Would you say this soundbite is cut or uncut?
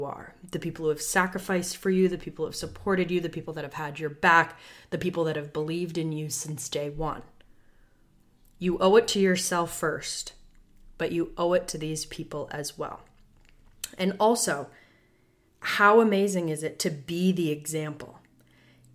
uncut